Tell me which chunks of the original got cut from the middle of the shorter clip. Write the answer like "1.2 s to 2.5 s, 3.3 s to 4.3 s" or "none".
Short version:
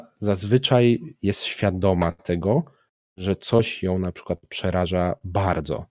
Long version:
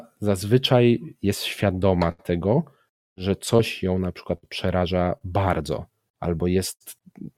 none